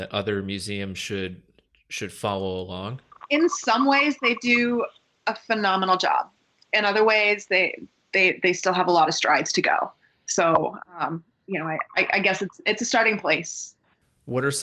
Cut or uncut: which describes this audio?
uncut